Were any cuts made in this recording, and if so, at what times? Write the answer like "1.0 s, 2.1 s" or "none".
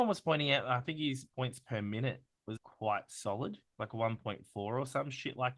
1.3 s, 2.6 s, 3.7 s